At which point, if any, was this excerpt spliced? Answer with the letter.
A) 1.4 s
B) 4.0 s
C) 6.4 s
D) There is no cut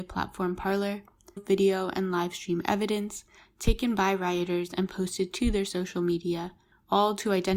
A